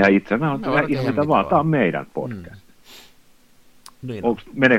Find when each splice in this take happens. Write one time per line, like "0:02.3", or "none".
none